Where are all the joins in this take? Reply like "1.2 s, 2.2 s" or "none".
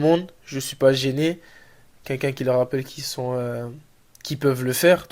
1.9 s